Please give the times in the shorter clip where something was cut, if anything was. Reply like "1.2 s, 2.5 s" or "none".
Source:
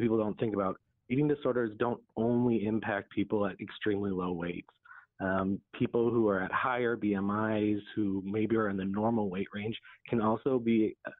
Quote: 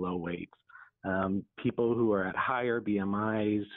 none